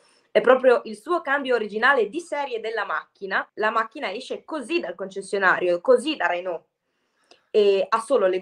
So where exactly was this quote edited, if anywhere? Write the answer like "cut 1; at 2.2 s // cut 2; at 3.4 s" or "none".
cut 1; at 3.5 s